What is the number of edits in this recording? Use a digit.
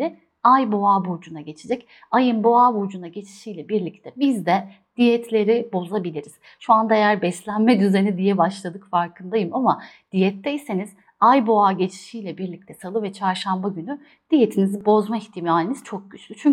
0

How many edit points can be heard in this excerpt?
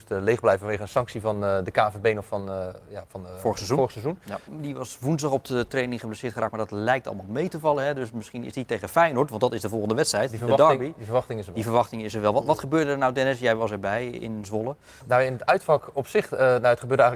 2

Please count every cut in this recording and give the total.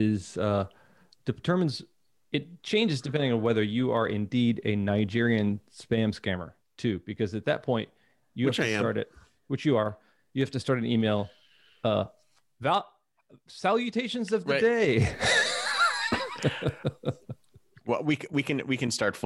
0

